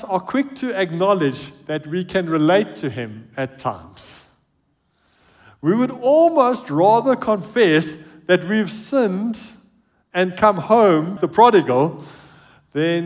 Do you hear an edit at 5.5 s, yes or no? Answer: no